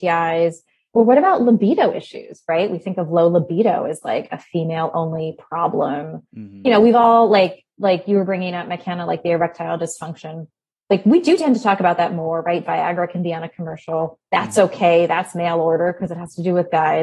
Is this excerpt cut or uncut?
uncut